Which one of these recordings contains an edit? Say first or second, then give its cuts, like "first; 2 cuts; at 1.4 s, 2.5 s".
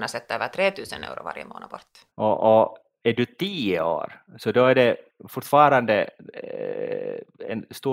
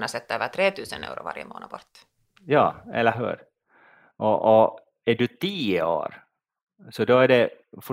first; 2 cuts; at 2.1 s, 4.3 s